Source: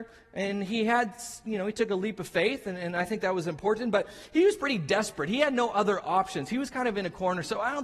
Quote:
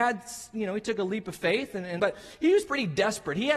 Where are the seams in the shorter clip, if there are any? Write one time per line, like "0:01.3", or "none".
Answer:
0:02.0